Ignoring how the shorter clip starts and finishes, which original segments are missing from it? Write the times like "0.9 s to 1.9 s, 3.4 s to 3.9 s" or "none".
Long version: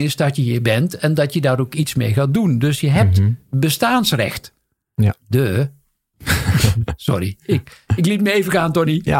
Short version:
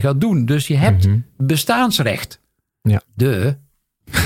none